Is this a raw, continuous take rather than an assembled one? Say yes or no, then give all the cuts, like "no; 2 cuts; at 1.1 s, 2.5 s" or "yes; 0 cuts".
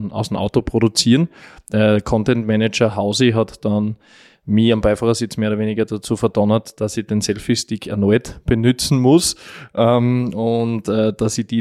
yes; 0 cuts